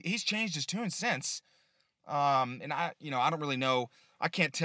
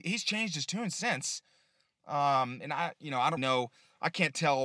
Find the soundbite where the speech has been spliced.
second; 1 cut; at 3.4 s

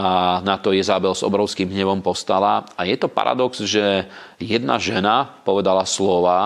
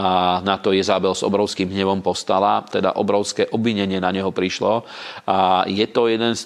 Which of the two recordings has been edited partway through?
second; 1 cut; at 2.7 s

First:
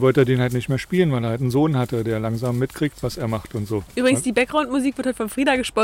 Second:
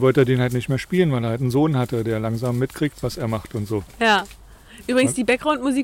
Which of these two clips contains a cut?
first; 1 cut; at 3.9 s

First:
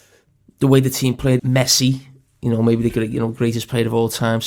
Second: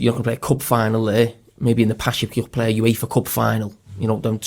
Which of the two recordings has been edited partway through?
first; 1 cut; at 1.4 s

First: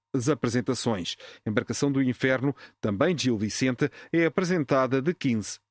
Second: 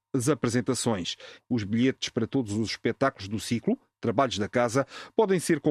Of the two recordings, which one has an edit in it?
second; 1 cut; at 1.4 s

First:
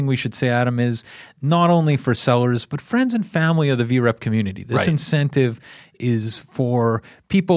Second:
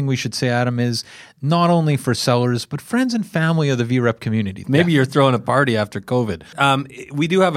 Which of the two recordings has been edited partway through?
second; 2 cuts; at 4.6 s, 6.5 s

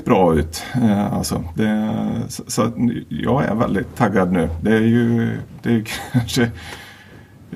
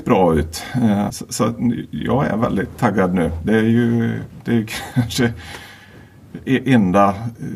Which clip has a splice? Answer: second; 1 cut; at 1.1 s

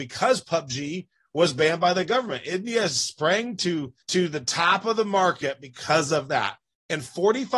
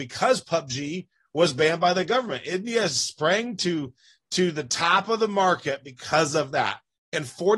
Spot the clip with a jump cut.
first; 1 cut; at 4.0 s

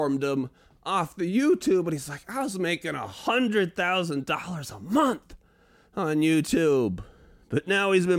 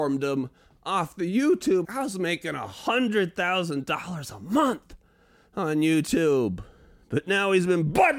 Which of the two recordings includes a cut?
second; 1 cut; at 1.8 s

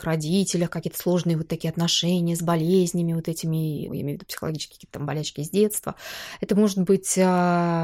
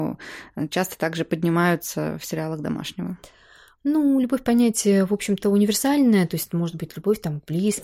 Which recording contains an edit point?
first; 1 cut; at 3.9 s

